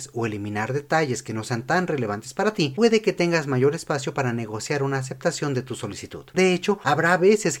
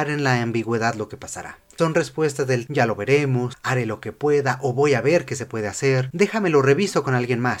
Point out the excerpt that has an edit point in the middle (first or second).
second